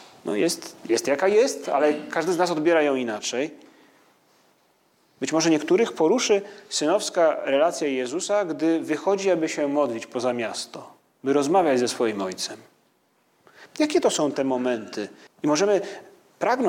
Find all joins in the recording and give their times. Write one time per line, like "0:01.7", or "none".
0:13.7
0:15.3